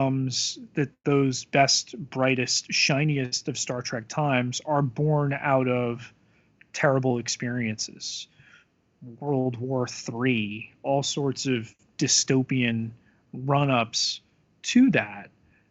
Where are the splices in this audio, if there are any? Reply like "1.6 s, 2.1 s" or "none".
none